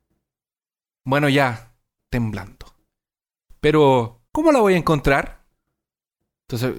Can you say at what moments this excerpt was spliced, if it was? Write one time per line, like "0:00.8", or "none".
0:02.0
0:04.3